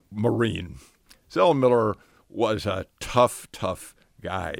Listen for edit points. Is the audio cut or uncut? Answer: uncut